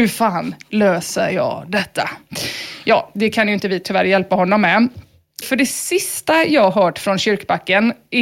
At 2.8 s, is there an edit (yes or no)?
no